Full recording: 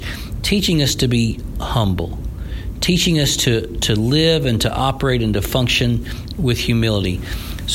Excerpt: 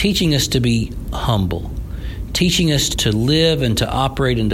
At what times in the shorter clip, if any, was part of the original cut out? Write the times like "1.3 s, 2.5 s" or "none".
2.9 s